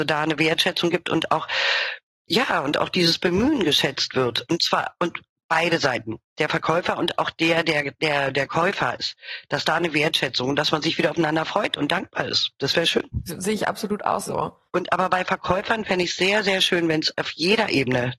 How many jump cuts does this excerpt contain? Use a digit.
1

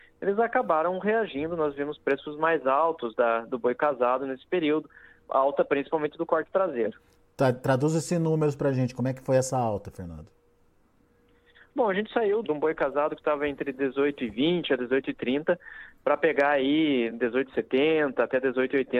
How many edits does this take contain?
2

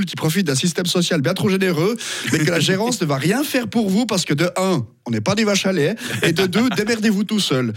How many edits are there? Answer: 0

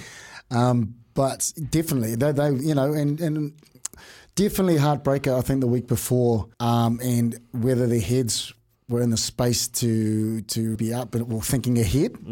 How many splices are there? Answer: 2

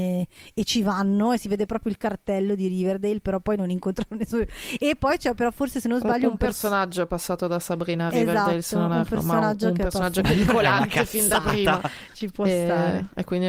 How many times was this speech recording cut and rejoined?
2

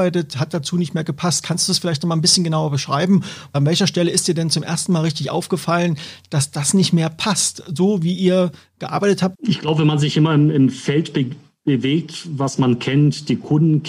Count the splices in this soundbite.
1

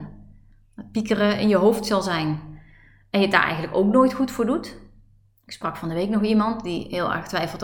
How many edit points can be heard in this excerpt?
0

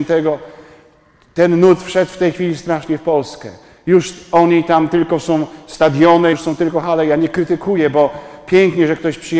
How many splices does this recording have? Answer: 1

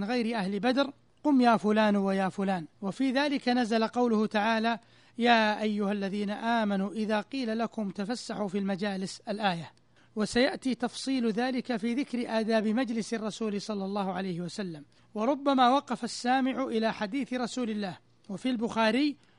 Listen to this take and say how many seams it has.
1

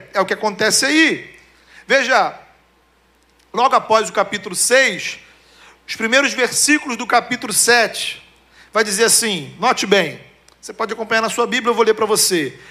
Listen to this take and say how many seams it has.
0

